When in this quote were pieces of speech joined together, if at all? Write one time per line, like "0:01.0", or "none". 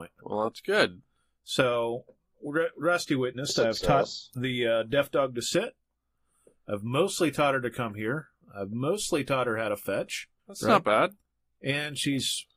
0:10.4